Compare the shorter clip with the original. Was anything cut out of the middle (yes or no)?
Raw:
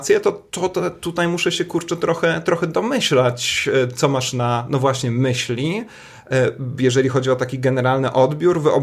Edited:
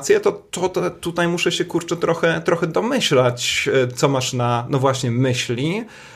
no